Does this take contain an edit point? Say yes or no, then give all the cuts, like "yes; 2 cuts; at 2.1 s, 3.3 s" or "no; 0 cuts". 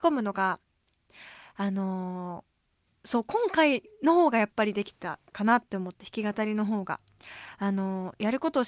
no; 0 cuts